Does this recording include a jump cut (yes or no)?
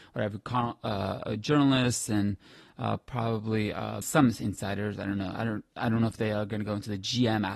yes